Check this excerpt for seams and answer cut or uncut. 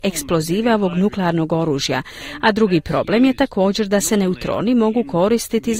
uncut